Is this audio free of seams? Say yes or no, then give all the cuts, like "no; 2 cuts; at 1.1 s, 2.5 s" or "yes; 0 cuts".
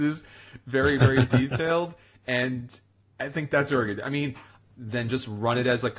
no; 1 cut; at 4.6 s